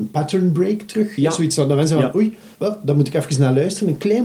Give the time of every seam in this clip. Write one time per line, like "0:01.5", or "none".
0:02.5